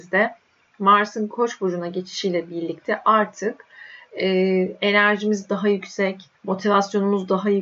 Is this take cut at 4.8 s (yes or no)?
no